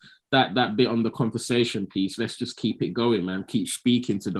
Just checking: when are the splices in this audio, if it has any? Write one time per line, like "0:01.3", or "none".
none